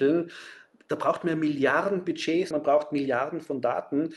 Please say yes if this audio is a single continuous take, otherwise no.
no